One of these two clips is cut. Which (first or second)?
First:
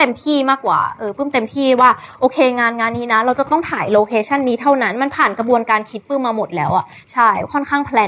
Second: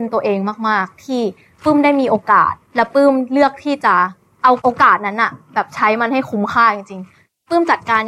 second